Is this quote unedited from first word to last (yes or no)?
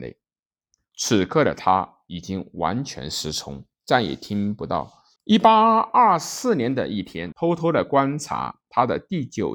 no